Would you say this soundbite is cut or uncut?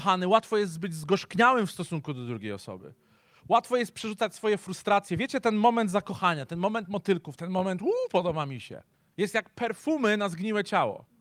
cut